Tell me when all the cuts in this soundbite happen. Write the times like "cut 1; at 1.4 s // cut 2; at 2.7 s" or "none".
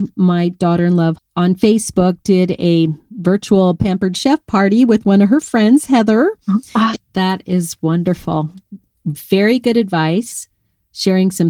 cut 1; at 1.1 s // cut 2; at 6.9 s